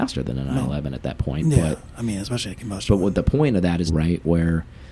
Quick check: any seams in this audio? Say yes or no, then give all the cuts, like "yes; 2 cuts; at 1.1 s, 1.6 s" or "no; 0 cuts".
yes; 1 cut; at 3.9 s